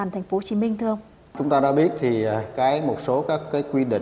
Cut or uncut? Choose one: uncut